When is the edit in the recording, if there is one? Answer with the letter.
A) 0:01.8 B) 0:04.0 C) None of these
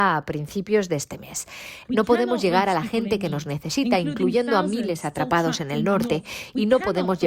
A